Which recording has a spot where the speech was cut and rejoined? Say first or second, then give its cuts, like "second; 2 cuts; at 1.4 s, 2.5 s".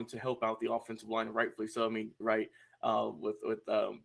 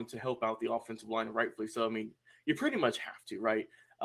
first; 1 cut; at 2.2 s